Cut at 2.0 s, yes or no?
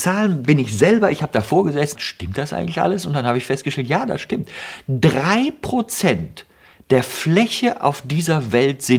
yes